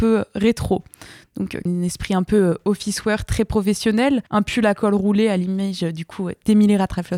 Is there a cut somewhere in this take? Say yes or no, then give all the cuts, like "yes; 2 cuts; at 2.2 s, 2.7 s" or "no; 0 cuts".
yes; 2 cuts; at 1.7 s, 4.3 s